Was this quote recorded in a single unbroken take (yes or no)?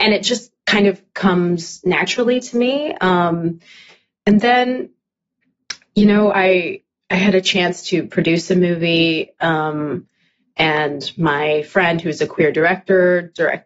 yes